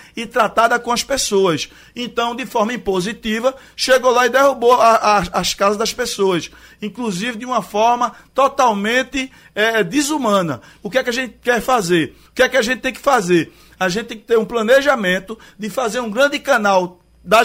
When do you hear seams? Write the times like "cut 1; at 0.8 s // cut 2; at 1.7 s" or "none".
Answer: cut 1; at 12.2 s